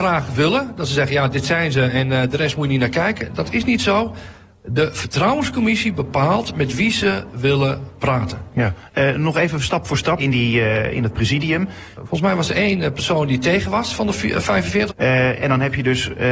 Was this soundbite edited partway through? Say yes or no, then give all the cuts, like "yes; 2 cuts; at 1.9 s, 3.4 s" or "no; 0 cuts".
yes; 3 cuts; at 10.2 s, 11.9 s, 14.9 s